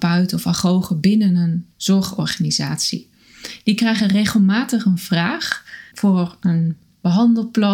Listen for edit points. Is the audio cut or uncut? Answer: cut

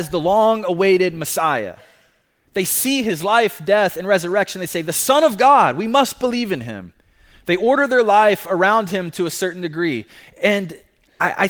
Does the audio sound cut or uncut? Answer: uncut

